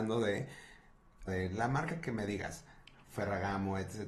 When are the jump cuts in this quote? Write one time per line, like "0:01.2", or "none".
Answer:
0:01.3